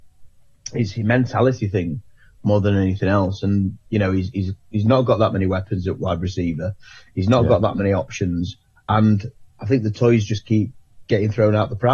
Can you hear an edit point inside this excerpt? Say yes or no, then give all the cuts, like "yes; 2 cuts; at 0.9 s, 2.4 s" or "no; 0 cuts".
no; 0 cuts